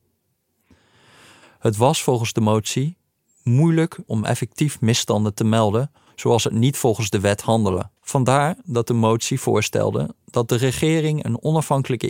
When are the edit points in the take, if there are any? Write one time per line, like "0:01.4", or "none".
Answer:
0:04.1
0:08.0

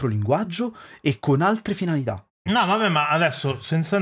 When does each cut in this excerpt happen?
0:02.5

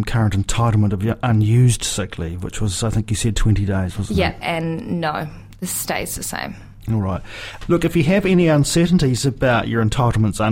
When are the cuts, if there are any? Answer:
0:04.4
0:07.6

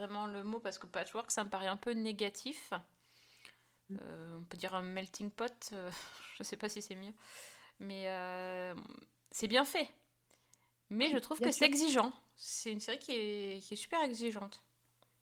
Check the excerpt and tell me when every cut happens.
none

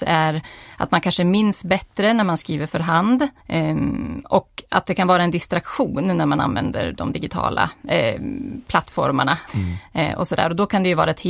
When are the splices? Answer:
0:03.4
0:09.5

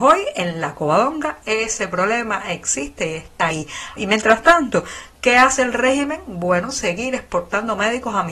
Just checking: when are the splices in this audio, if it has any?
0:04.0

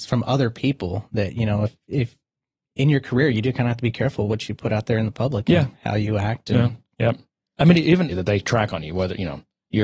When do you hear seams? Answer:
0:06.9
0:08.1

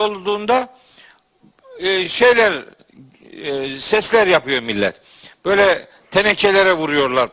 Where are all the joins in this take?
none

